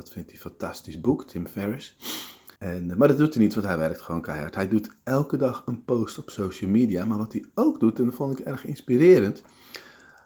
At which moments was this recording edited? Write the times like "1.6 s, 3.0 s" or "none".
2.6 s